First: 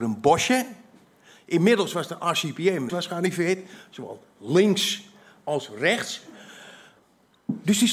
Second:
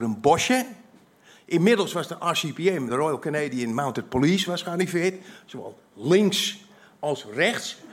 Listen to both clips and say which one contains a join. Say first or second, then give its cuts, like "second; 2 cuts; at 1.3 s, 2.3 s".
first; 1 cut; at 2.9 s